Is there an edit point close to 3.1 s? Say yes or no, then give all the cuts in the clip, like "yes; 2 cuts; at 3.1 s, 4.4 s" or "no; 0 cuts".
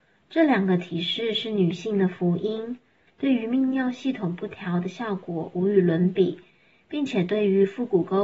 yes; 1 cut; at 3.1 s